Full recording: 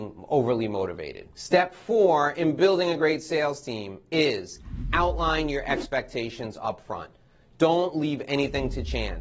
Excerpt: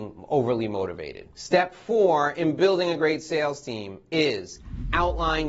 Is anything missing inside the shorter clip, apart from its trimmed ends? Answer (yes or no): no